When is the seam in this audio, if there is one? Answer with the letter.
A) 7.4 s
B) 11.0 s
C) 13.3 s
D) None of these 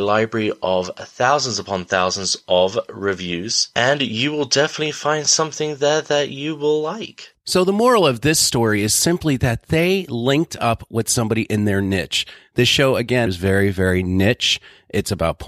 C